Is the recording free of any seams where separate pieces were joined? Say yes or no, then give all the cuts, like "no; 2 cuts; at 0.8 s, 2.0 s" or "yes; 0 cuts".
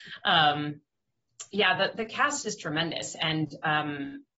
yes; 0 cuts